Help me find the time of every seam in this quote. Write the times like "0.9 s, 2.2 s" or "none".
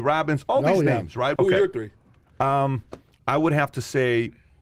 1.4 s